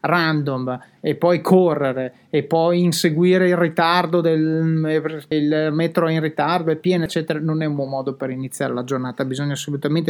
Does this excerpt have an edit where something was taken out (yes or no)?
yes